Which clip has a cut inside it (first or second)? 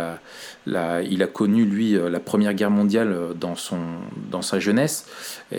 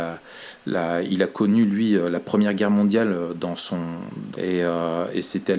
second